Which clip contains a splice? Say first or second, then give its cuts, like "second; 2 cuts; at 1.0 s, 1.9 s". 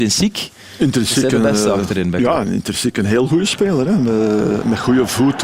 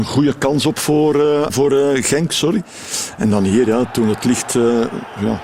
second; 1 cut; at 1.5 s